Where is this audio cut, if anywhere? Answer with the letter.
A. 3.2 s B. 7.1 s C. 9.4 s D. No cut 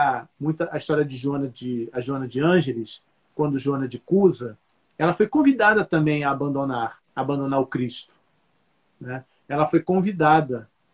B